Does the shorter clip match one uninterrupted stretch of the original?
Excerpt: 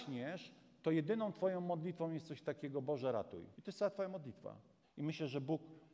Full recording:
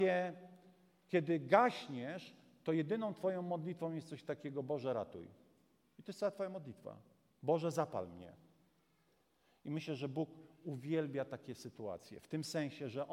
no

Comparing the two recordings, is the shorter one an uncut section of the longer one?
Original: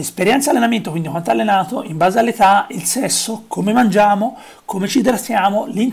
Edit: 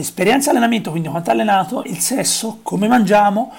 no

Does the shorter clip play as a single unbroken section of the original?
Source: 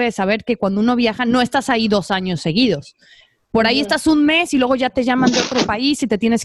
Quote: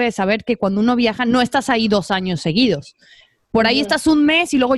yes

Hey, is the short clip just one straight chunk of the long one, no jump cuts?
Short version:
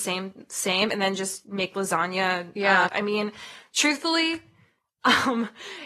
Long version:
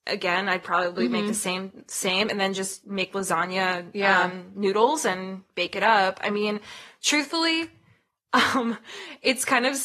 no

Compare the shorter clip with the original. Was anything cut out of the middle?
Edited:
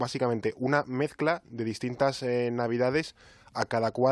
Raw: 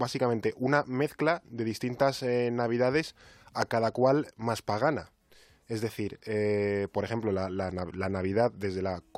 no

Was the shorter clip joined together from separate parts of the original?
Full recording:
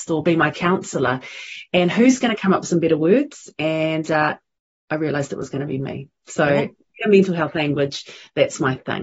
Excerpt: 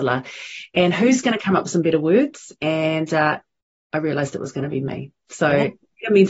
no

